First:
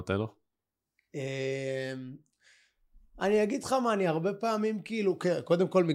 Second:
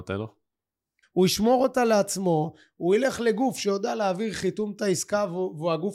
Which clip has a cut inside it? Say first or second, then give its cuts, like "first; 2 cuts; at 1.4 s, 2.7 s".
second; 1 cut; at 1.0 s